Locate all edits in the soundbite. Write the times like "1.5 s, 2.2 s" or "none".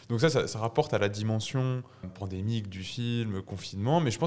2.0 s